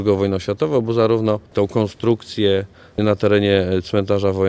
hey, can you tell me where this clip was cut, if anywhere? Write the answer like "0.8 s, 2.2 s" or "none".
1.5 s